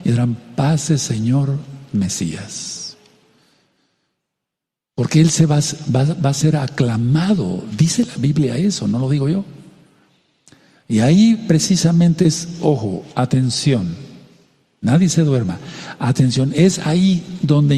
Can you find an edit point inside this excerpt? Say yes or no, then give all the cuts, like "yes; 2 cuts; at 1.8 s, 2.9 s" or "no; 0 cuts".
no; 0 cuts